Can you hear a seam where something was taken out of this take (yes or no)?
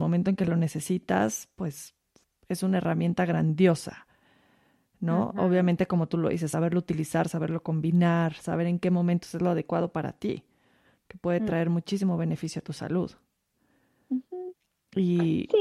no